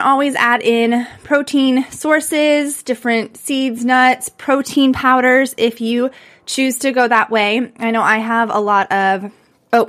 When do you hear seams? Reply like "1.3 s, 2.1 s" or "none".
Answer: none